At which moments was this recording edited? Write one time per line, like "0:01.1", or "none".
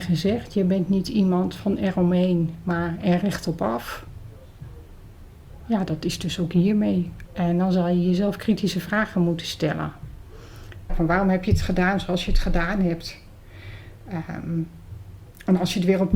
0:07.3
0:10.9